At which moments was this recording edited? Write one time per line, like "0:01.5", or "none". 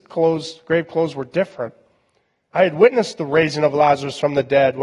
0:02.5